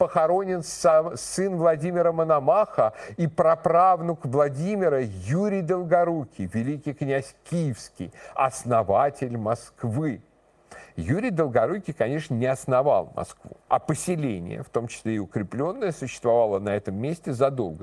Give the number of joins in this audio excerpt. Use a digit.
1